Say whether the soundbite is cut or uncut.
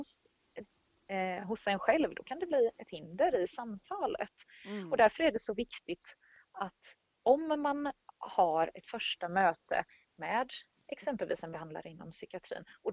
uncut